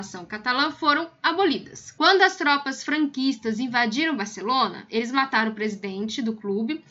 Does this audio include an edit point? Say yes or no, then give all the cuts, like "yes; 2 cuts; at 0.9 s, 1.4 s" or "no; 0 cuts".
no; 0 cuts